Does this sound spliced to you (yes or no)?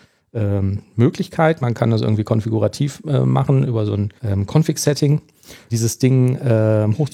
yes